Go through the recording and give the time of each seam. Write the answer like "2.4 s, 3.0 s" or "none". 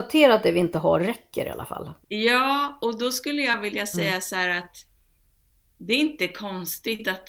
2.0 s

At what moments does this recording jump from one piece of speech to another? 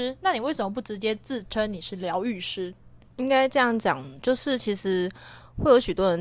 3.1 s

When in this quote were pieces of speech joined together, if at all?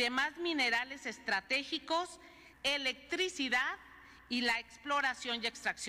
2.5 s

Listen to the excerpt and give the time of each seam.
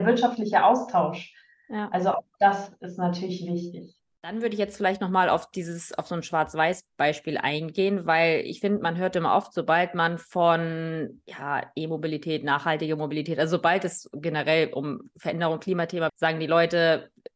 16.1 s

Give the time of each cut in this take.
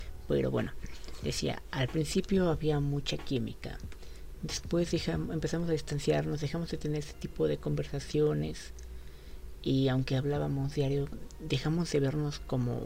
none

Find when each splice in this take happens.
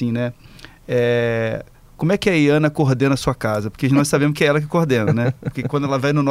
none

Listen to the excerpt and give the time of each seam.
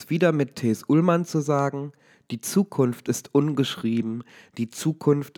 none

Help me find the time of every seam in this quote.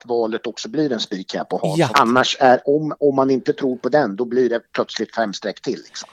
1.9 s

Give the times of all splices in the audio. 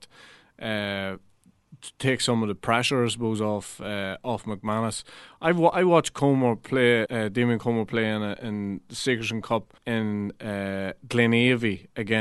7.1 s, 9.8 s

